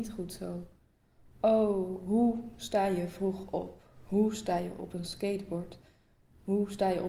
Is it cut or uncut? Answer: uncut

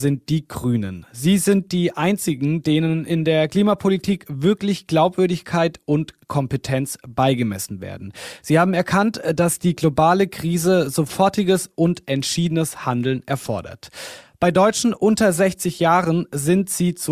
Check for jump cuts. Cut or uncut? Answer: uncut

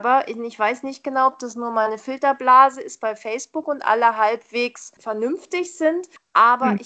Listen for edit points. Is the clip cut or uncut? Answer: uncut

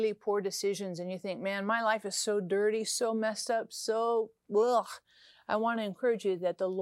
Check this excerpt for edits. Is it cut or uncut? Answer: uncut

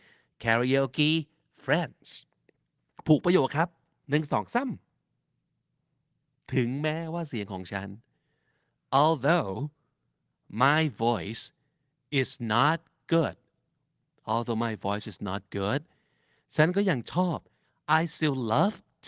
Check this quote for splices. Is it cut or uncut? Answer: uncut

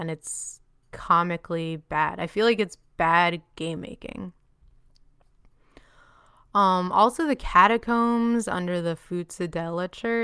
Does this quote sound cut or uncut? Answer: cut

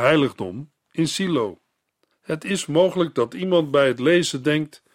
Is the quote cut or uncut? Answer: cut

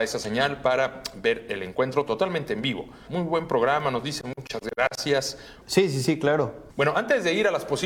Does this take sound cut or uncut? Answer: cut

